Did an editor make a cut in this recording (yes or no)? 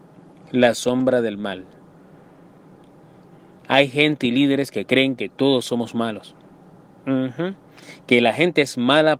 no